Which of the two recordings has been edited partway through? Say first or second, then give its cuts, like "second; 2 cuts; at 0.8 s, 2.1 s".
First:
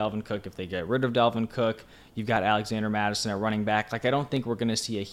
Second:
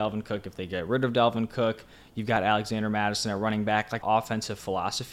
second; 1 cut; at 4.0 s